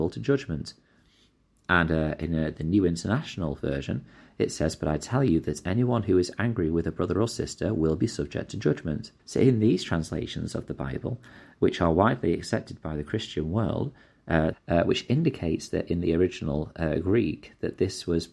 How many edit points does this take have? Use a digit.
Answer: 2